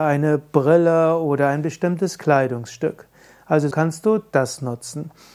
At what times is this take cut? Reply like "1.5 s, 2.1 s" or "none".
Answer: 3.7 s

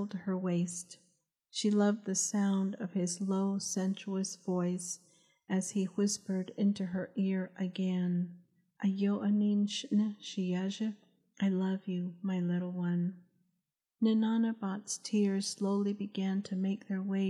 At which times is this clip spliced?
none

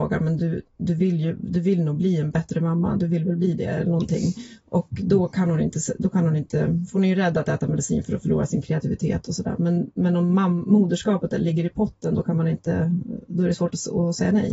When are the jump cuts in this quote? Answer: none

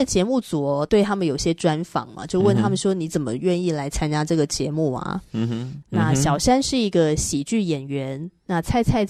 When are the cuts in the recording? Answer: 5.8 s

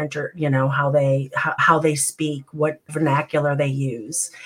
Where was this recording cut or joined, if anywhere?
1.6 s, 2.9 s

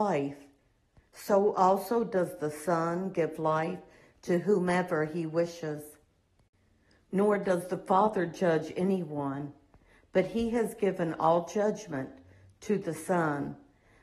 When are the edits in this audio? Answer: none

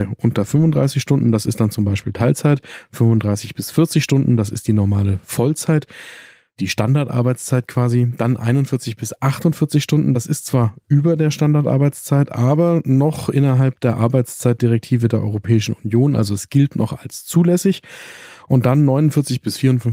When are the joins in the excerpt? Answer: none

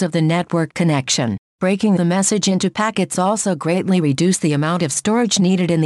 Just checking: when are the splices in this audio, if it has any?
none

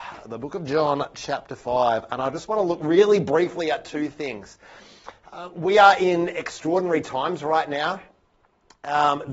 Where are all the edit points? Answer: none

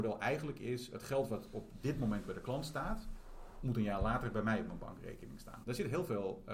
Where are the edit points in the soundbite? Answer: 5.6 s

